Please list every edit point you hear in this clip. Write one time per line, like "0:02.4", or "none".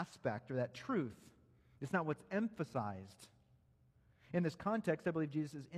none